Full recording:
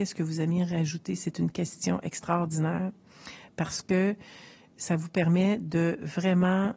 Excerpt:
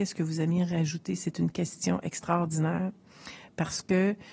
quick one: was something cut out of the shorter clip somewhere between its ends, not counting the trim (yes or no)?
no